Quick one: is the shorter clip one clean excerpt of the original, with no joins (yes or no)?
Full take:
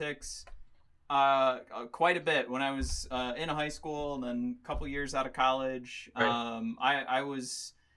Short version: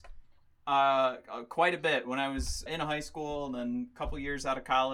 no